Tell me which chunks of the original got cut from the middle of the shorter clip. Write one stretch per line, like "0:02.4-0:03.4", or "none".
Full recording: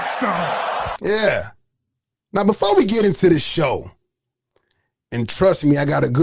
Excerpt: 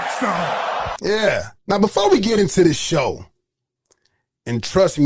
0:01.6-0:02.2